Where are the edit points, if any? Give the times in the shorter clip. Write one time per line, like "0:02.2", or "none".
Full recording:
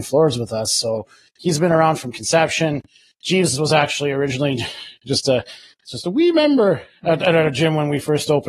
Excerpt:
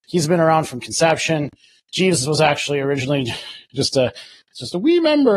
none